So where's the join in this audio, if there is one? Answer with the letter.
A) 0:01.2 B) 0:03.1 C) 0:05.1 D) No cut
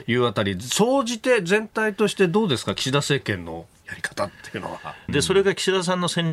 C